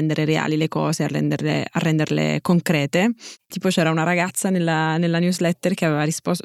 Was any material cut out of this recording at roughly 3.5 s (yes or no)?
yes